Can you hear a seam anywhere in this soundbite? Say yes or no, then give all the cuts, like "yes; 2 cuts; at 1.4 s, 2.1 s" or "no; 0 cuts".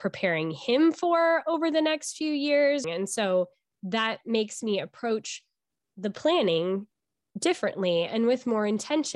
yes; 1 cut; at 2.8 s